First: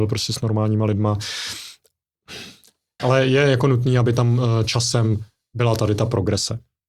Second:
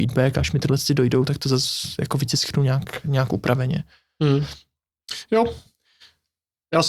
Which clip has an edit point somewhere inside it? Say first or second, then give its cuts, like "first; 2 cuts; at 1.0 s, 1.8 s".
first; 1 cut; at 3.0 s